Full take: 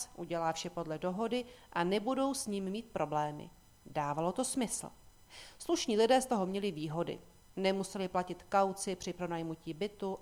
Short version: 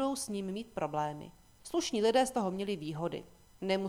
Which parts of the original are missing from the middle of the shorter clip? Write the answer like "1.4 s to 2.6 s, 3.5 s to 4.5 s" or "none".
3.8 s to 5.5 s